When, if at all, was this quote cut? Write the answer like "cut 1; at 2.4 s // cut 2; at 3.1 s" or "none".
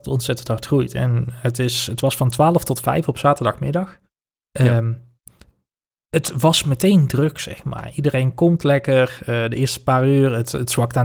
none